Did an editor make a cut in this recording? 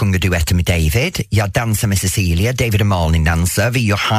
no; 0 cuts

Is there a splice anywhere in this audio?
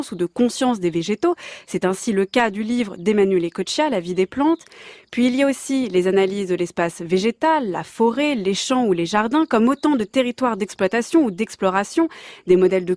no; 0 cuts

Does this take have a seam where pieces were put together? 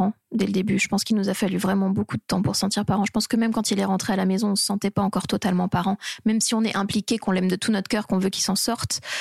no; 0 cuts

